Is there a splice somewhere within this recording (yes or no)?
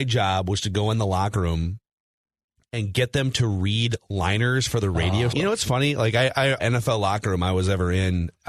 yes